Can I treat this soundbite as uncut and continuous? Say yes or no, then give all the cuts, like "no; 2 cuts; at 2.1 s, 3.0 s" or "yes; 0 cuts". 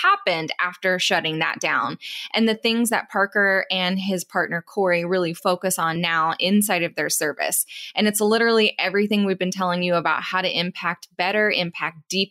yes; 0 cuts